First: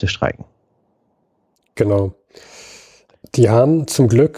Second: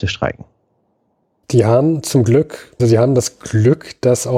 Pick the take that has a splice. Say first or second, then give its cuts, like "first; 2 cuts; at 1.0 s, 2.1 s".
second; 2 cuts; at 1.4 s, 2.8 s